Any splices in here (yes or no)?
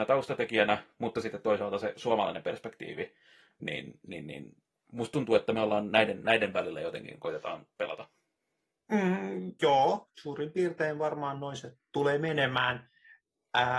no